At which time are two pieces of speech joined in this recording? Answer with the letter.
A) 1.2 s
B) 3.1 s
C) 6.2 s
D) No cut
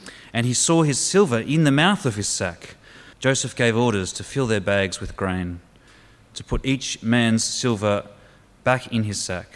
B